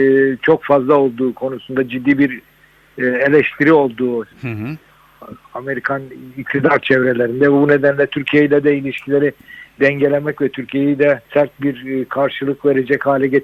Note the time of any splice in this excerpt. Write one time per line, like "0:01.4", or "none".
0:11.3